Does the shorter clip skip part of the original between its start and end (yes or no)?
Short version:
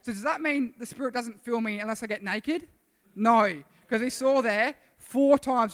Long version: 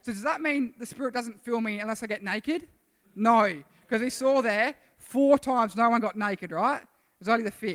no